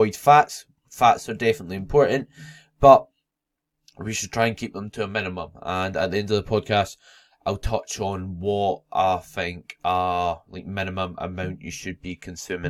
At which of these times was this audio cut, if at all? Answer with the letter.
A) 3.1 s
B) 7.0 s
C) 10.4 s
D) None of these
D